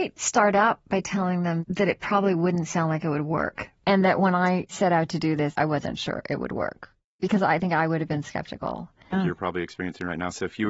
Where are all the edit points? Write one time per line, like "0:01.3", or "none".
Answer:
0:09.1